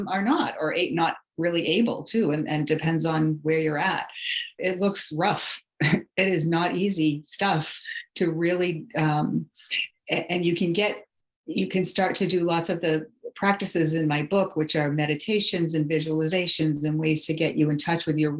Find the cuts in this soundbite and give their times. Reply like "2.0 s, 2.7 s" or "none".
4.6 s